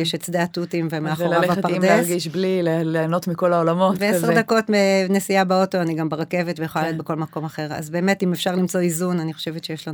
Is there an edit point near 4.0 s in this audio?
no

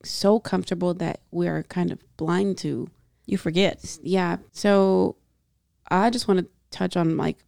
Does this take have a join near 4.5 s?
yes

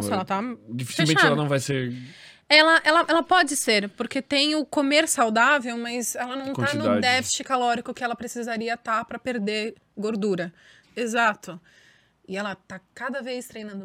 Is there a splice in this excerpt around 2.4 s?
no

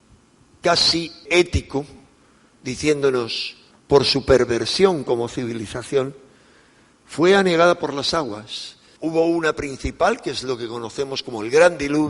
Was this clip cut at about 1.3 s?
yes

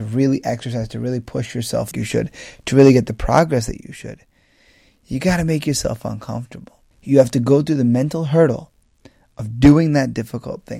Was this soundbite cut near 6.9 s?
yes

